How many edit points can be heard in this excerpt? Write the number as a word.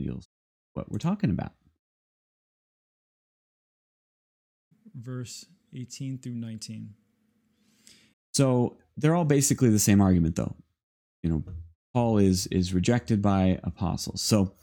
one